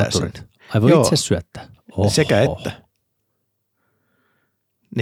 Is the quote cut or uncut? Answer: uncut